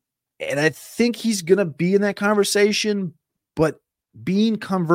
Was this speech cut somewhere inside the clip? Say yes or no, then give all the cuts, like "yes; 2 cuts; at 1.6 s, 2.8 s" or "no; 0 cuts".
no; 0 cuts